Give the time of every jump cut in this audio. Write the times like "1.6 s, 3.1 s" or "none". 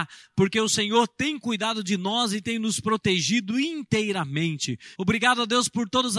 4.9 s

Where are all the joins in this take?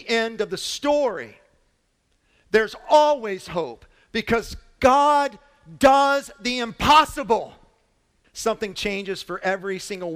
8.2 s

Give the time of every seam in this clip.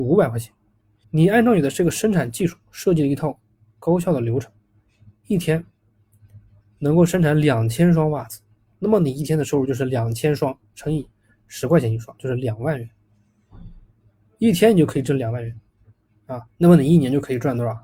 1.0 s, 16.5 s

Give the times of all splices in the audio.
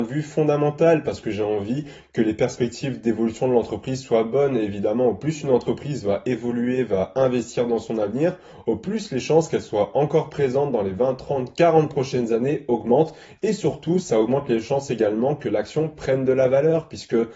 none

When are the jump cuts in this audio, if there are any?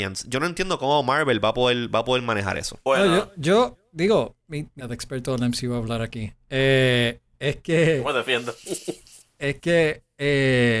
4.8 s

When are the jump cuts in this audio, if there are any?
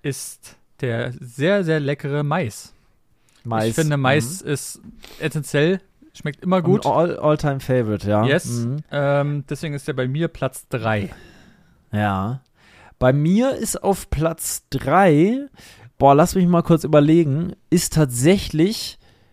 none

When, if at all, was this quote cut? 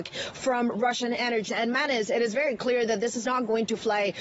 1.5 s

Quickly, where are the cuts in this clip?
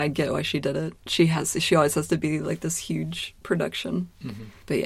none

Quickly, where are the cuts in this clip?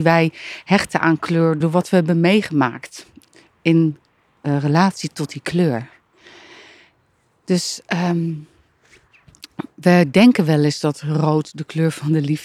1.6 s

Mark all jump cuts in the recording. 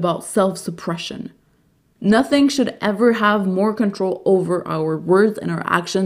1.9 s

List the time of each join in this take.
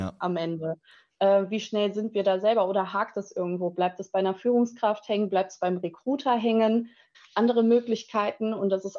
7.1 s

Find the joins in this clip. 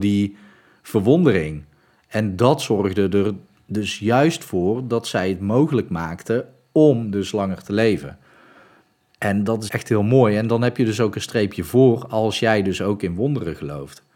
9.7 s

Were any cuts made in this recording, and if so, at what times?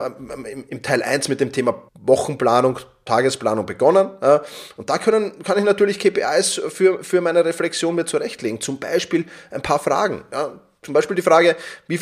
1.9 s

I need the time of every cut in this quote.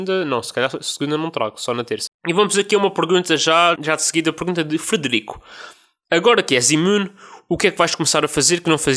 2.1 s, 3.8 s

